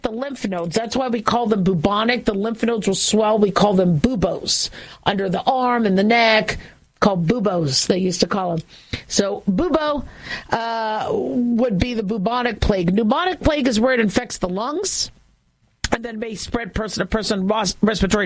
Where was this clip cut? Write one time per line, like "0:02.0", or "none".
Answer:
none